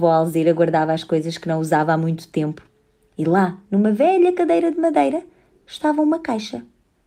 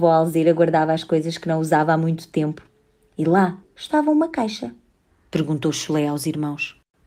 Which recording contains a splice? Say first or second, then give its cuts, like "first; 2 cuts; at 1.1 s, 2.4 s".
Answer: second; 2 cuts; at 3.6 s, 5.1 s